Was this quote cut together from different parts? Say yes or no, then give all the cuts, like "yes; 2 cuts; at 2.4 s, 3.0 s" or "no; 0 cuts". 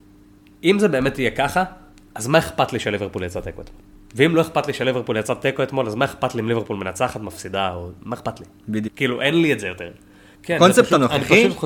yes; 2 cuts; at 8.9 s, 10.3 s